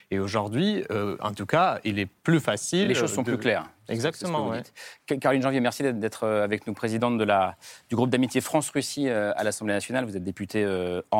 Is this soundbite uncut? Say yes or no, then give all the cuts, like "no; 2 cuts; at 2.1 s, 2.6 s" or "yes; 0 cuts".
yes; 0 cuts